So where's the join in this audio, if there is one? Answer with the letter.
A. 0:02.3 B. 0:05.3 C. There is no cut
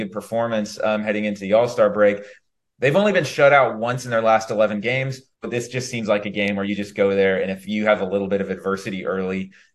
B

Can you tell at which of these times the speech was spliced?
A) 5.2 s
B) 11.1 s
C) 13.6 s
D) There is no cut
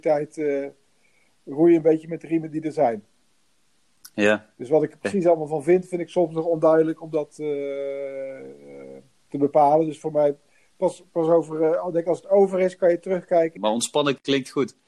C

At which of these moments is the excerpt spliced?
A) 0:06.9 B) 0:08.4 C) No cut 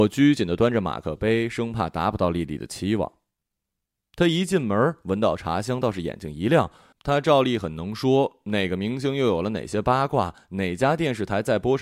A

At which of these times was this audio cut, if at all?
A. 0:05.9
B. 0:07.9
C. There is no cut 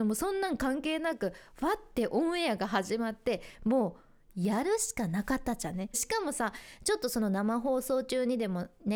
A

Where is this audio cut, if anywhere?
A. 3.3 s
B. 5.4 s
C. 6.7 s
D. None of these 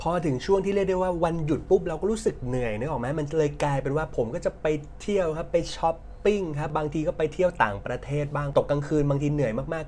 C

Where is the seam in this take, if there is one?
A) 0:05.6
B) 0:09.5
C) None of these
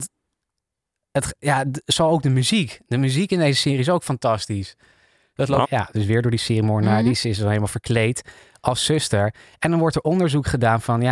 A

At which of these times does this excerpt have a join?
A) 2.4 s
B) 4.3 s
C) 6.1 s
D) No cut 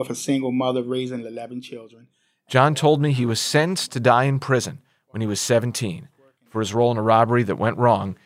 D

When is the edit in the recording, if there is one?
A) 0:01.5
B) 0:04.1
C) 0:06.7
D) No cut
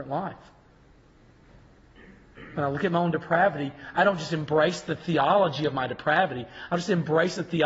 D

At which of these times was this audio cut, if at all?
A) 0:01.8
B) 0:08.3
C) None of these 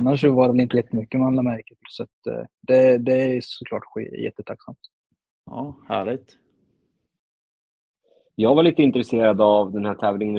A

